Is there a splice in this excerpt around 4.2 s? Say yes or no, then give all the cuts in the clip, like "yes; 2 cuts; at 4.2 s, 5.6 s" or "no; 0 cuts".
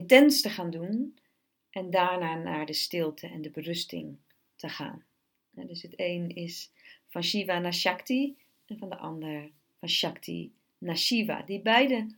no; 0 cuts